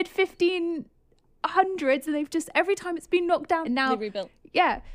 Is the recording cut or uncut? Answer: cut